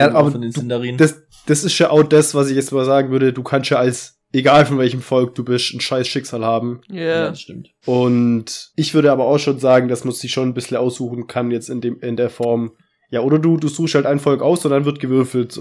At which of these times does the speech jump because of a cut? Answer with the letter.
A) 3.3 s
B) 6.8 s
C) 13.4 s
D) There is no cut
D